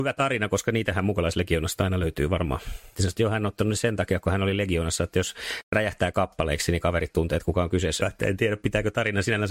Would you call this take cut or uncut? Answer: cut